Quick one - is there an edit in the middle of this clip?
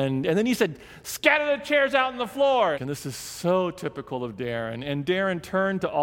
yes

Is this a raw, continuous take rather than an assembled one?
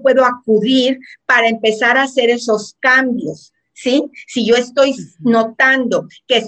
yes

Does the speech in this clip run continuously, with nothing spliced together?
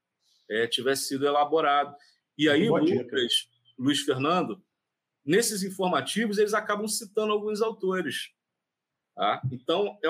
yes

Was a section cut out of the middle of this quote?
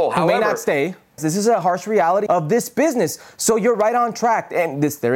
yes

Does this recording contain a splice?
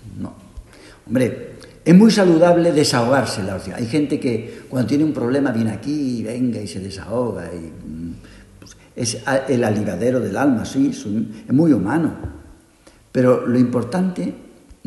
no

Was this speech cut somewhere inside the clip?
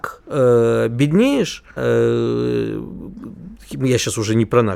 yes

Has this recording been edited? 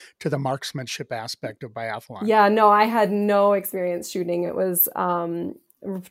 no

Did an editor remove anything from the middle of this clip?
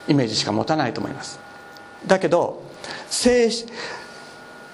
yes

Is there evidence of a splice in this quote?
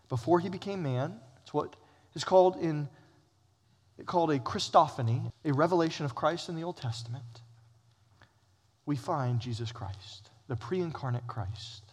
yes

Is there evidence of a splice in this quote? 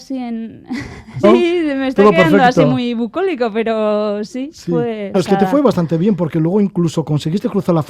yes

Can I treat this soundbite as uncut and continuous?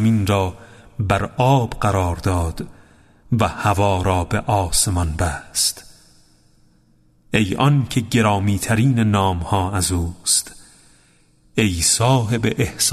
yes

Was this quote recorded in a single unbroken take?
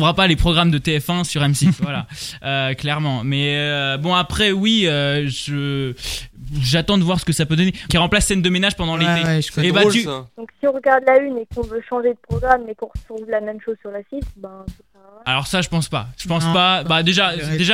no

